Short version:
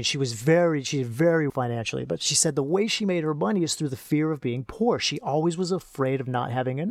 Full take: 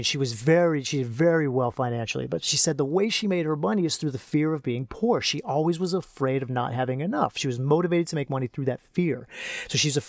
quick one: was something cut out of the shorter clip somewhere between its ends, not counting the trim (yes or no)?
yes